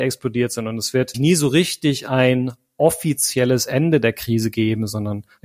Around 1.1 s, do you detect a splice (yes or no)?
yes